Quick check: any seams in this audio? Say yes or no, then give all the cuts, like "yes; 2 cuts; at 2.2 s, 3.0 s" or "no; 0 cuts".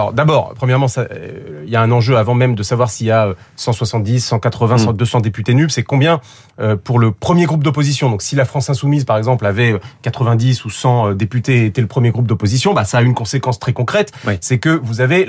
no; 0 cuts